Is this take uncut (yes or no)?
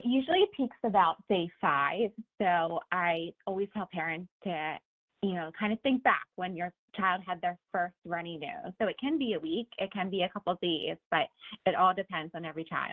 no